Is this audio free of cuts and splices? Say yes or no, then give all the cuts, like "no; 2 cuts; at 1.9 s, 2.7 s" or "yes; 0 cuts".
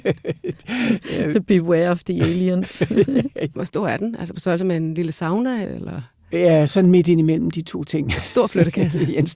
no; 2 cuts; at 3.5 s, 5.6 s